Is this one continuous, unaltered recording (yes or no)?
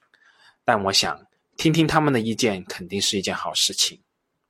yes